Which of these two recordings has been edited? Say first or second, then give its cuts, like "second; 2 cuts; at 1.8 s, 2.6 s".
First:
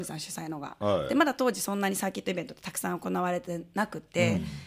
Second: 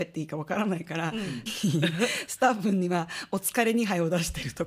second; 1 cut; at 1.5 s